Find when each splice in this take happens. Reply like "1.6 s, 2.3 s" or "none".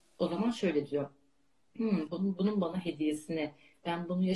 2.1 s